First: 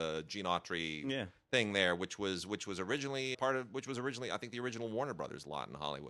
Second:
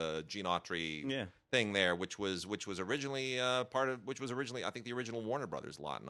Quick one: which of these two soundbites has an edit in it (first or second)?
first